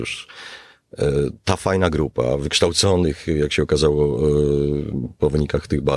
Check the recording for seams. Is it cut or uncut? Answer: uncut